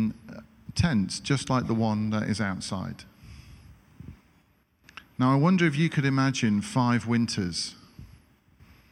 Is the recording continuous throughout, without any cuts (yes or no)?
yes